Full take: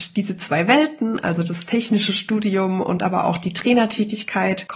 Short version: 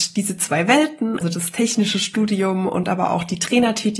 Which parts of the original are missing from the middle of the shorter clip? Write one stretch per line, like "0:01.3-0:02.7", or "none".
0:01.2-0:01.3